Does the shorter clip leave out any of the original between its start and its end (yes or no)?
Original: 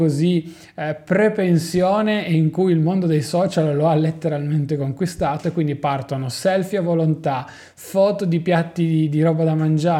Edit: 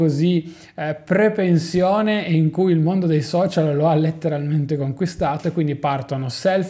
no